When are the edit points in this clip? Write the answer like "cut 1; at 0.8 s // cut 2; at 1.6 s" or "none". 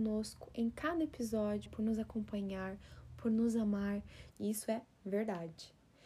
cut 1; at 1.7 s // cut 2; at 4.3 s